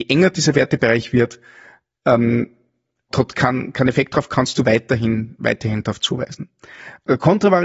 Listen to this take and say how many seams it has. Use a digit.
1